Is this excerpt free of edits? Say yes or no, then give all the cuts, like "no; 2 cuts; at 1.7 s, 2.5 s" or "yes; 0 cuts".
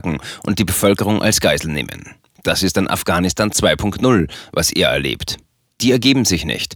no; 1 cut; at 2.3 s